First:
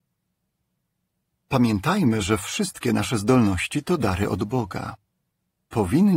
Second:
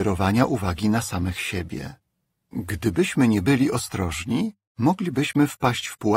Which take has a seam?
second; 1 cut; at 2.5 s

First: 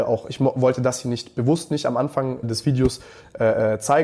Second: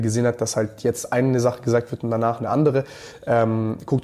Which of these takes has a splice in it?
first; 1 cut; at 2.4 s

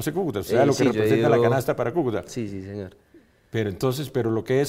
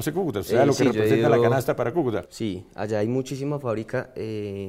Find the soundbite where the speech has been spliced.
second; 1 cut; at 2.2 s

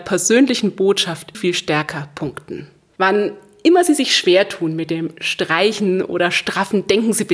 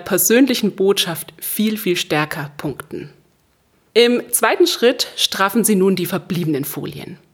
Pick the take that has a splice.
first; 2 cuts; at 1.3 s, 2.9 s

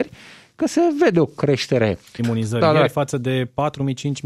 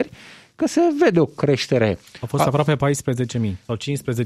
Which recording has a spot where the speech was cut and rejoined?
first; 1 cut; at 2.2 s

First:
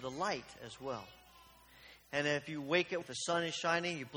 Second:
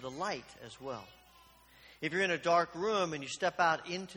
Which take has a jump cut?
first; 2 cuts; at 2.0 s, 3.0 s

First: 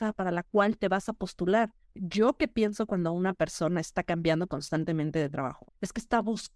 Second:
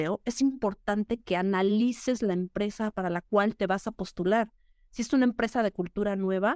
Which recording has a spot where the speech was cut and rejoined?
first; 2 cuts; at 1.8 s, 5.6 s

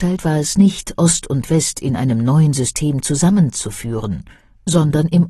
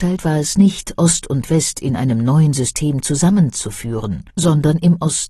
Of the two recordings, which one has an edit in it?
second; 1 cut; at 4.3 s

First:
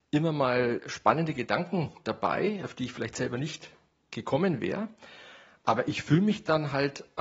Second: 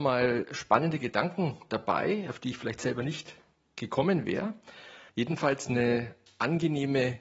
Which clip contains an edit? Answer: second; 1 cut; at 5.1 s

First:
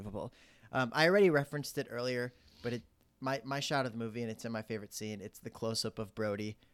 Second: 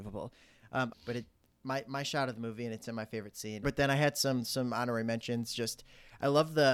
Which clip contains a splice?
second; 2 cuts; at 0.9 s, 3.6 s

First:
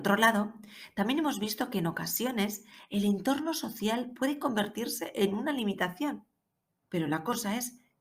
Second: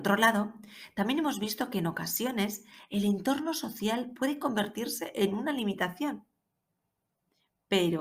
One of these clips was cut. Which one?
first; 1 cut; at 6.8 s

